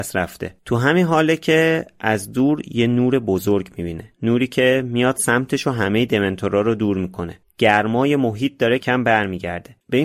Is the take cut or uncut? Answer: cut